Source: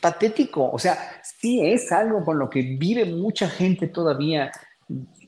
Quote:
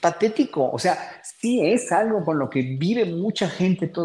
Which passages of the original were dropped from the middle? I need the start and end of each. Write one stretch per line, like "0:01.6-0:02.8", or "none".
none